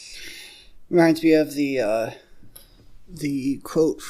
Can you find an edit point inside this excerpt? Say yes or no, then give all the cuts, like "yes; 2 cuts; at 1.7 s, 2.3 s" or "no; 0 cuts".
no; 0 cuts